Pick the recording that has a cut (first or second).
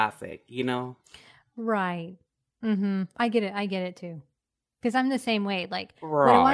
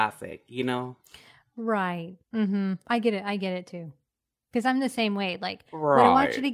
second